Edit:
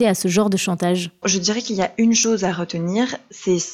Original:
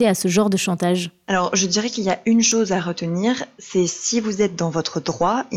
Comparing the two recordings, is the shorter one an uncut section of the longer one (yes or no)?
no